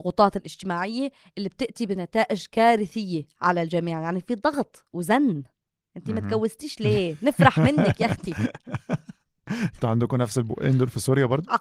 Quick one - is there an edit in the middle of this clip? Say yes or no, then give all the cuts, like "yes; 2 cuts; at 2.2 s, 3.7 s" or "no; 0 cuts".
no; 0 cuts